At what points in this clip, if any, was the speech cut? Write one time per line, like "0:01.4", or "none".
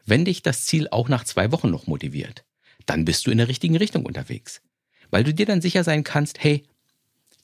none